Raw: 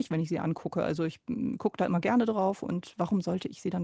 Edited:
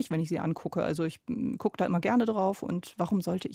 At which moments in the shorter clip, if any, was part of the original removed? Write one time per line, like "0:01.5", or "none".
none